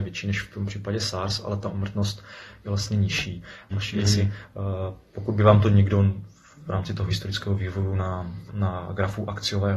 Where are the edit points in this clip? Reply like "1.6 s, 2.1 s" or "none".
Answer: 3.7 s, 8.5 s